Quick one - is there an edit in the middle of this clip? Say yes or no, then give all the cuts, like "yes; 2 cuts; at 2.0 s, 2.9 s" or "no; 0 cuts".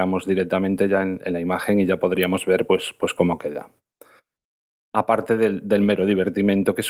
no; 0 cuts